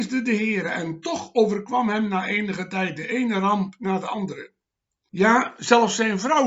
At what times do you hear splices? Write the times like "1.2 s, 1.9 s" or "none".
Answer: 5.1 s